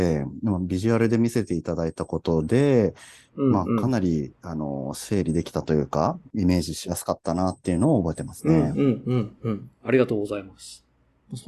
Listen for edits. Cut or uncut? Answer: uncut